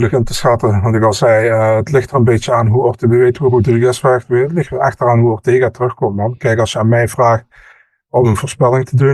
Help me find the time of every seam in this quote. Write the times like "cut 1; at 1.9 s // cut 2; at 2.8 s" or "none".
none